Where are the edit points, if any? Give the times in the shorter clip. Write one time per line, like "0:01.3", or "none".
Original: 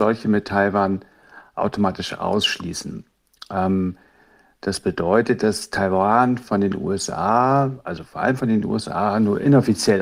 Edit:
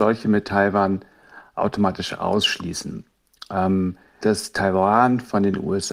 0:04.2